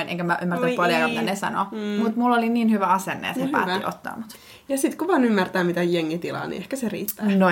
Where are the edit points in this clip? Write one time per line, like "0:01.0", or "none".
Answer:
none